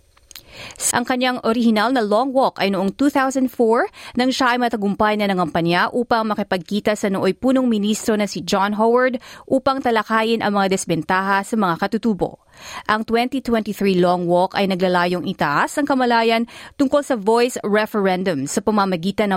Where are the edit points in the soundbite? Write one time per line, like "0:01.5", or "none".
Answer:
0:00.9